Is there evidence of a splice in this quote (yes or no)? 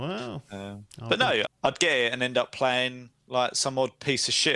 yes